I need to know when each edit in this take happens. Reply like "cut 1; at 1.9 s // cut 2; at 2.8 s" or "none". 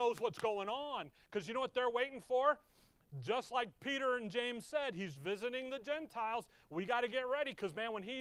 cut 1; at 5.2 s